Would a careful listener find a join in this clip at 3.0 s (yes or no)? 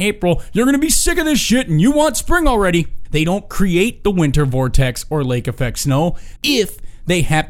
yes